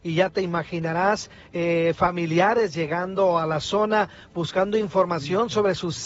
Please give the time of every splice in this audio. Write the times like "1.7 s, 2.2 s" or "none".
none